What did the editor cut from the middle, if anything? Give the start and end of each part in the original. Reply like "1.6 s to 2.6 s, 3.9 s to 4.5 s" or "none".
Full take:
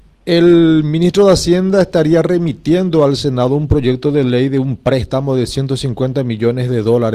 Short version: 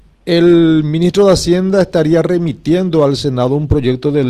none

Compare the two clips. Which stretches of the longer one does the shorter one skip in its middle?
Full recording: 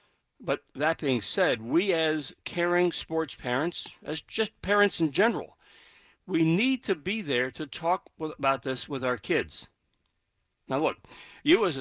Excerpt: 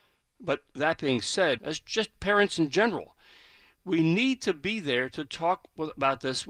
1.6 s to 4.0 s

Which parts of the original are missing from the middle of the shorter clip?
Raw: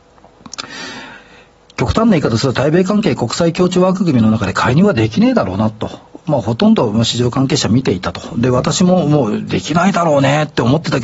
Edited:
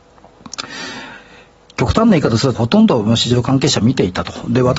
2.5 s to 6.4 s

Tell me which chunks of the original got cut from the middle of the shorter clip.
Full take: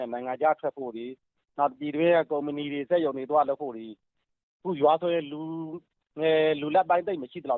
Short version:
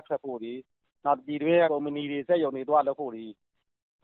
2.2 s to 2.3 s

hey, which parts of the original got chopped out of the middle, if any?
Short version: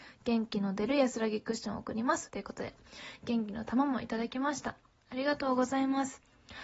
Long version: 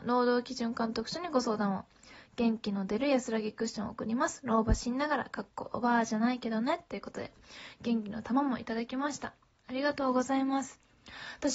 4.4 s to 6.9 s

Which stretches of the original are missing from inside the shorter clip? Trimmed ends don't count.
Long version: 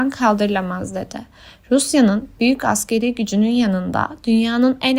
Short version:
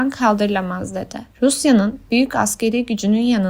1.3 s to 1.6 s

